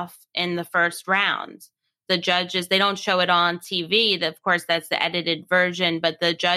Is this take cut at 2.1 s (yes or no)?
yes